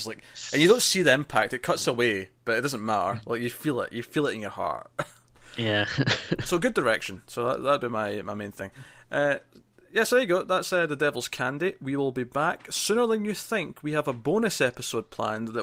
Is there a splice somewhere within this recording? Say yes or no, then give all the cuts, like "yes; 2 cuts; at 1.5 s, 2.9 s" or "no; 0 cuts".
no; 0 cuts